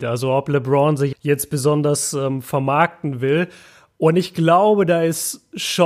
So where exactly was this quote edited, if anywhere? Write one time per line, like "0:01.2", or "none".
0:01.1